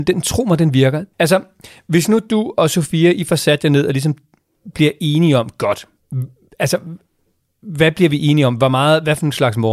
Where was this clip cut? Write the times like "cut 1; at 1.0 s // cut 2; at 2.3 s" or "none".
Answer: cut 1; at 1.1 s